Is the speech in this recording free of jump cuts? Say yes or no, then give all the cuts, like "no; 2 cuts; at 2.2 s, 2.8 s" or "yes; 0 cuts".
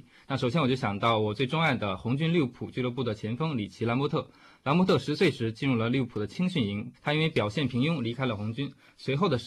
no; 1 cut; at 6.9 s